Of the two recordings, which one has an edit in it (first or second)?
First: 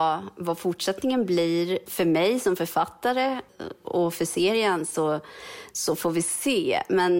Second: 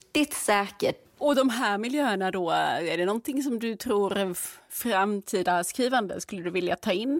second